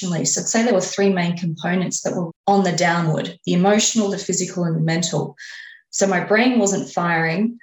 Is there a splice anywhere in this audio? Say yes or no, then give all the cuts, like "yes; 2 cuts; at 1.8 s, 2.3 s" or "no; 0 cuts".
yes; 1 cut; at 2.3 s